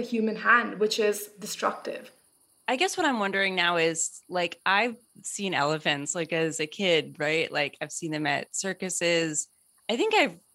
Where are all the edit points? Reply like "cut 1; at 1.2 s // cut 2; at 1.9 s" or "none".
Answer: none